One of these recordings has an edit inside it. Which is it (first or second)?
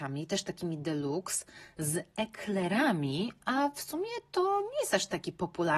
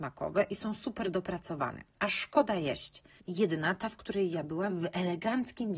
second